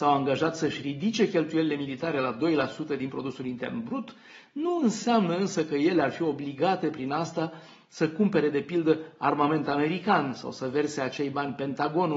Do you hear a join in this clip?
no; 0 cuts

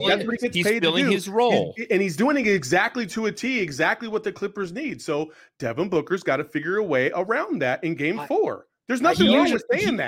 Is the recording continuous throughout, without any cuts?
yes; 0 cuts

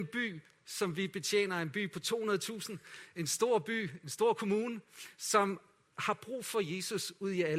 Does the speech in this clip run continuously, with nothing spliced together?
yes; 0 cuts

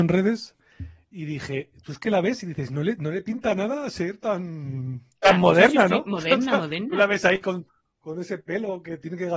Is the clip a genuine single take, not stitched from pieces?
no; 1 cut; at 5.2 s

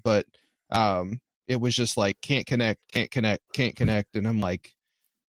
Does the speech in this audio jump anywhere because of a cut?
yes; 2 cuts; at 1.4 s, 2.9 s

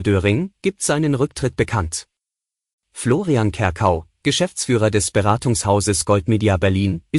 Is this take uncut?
no; 1 cut; at 2.7 s

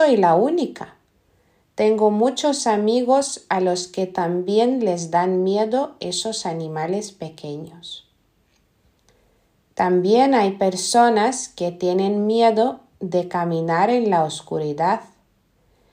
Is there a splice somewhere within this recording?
no; 0 cuts

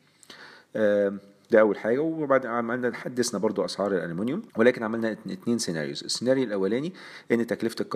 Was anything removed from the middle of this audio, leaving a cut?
yes; 1 cut; at 4.5 s

